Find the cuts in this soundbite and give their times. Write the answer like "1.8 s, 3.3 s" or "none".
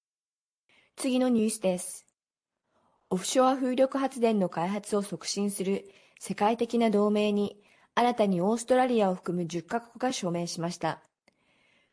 none